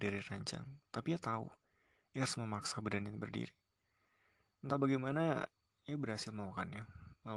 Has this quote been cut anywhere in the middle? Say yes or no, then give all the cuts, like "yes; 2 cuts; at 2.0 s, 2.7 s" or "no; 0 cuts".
no; 0 cuts